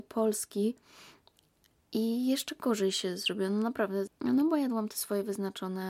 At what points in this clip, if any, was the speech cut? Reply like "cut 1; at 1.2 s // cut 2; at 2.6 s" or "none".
cut 1; at 4.1 s